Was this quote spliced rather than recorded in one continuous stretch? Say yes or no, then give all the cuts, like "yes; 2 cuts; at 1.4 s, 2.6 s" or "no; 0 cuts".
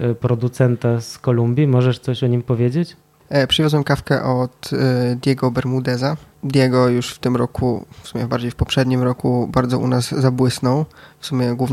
no; 0 cuts